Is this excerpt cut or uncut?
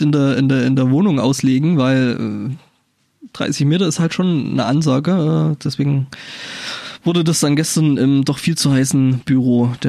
uncut